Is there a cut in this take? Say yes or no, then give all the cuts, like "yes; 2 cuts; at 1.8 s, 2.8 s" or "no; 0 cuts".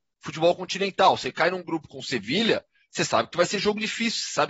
no; 0 cuts